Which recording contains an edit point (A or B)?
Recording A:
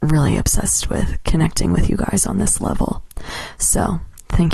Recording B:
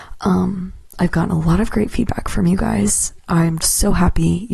B